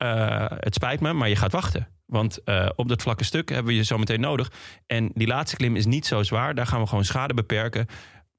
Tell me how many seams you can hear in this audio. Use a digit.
0